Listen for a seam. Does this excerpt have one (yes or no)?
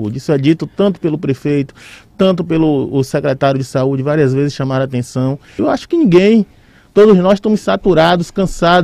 yes